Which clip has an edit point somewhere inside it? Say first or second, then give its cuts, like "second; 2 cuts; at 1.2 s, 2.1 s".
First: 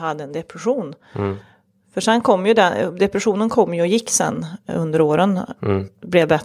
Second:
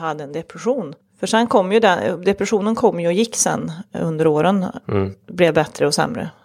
second; 1 cut; at 1.0 s